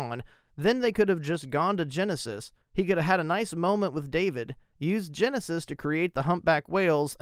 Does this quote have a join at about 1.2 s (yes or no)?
no